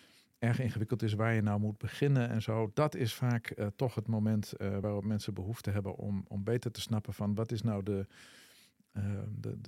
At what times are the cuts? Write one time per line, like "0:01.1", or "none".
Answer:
none